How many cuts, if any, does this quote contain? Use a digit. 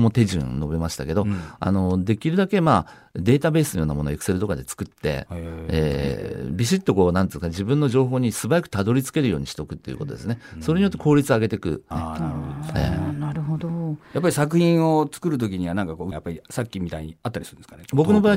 2